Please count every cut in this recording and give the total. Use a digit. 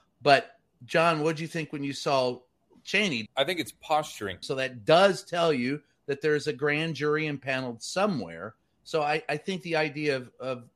2